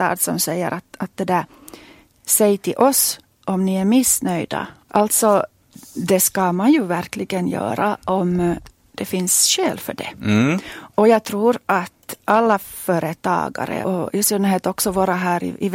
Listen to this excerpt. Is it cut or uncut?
cut